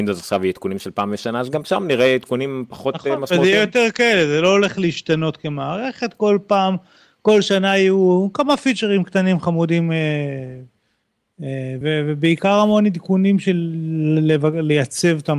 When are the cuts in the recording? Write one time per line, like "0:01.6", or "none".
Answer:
0:11.8